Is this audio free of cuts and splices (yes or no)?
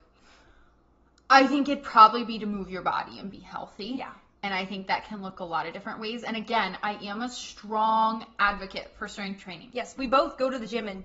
yes